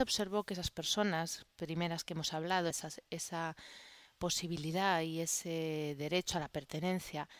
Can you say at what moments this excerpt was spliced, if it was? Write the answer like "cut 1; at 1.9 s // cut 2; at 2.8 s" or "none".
cut 1; at 2.7 s